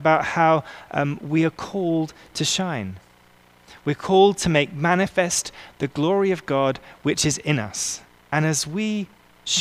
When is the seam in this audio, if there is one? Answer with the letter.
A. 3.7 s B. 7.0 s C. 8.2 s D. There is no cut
C